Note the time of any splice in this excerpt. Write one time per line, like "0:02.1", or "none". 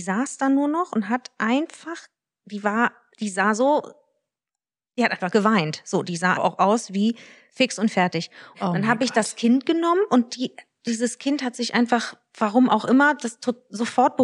0:03.1
0:06.4
0:08.5